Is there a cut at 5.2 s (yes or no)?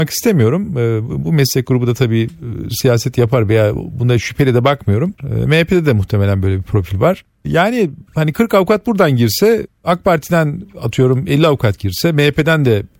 yes